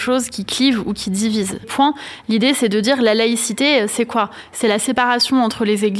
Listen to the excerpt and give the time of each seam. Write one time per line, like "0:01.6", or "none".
0:01.6